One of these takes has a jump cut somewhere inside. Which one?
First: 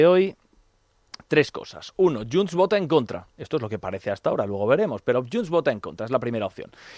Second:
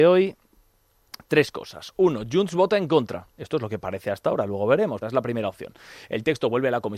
second; 1 cut; at 5.0 s

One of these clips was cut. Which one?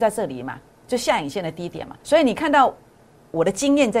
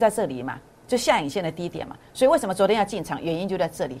first; 1 cut; at 2.0 s

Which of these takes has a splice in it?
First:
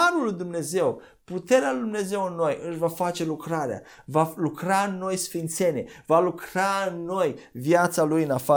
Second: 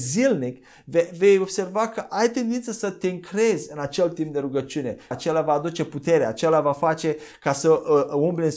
second; 1 cut; at 5.1 s

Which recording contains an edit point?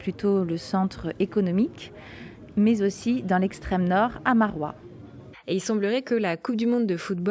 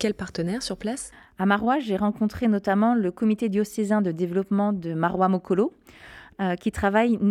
first; 1 cut; at 5.3 s

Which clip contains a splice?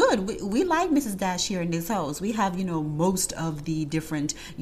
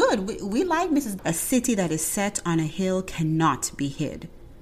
second; 1 cut; at 1.2 s

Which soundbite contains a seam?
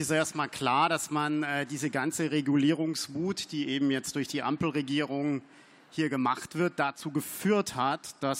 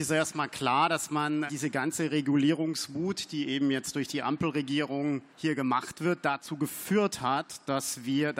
second; 2 cuts; at 1.5 s, 5.3 s

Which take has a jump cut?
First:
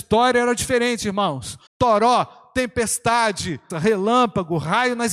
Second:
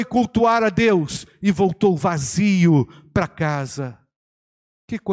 first; 2 cuts; at 1.7 s, 3.7 s

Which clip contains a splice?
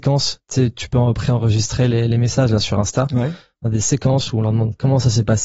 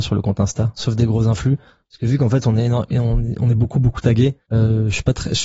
second; 1 cut; at 4.4 s

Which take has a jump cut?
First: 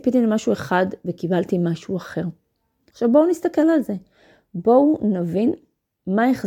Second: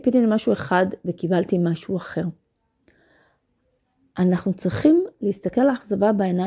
first; 1 cut; at 2.9 s

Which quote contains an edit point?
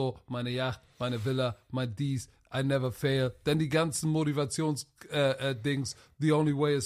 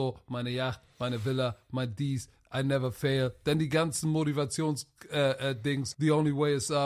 second; 1 cut; at 5.9 s

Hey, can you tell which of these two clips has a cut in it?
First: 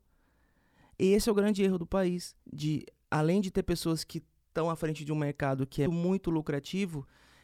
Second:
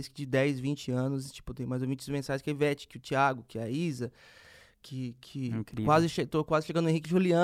first; 2 cuts; at 2.4 s, 5.9 s

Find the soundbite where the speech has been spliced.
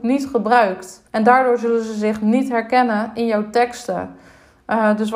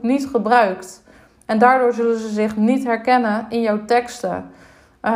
first; 1 cut; at 1.1 s

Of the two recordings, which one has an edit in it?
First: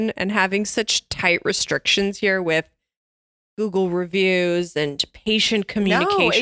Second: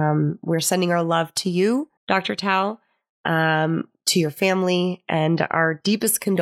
second; 1 cut; at 2.0 s

